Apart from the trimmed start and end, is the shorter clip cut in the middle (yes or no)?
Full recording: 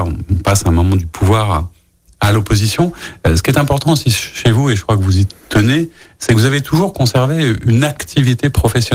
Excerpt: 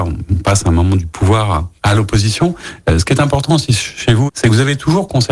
yes